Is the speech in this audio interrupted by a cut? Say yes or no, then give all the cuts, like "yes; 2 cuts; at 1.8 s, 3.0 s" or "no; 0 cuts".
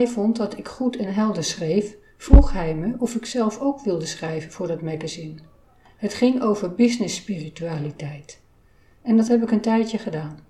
no; 0 cuts